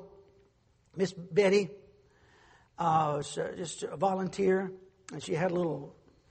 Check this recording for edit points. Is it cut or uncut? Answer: uncut